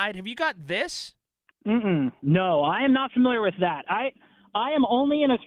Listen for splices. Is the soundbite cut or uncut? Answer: uncut